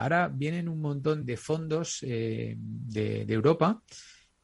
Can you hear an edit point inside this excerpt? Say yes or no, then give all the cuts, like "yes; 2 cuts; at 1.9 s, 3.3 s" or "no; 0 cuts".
yes; 1 cut; at 1.2 s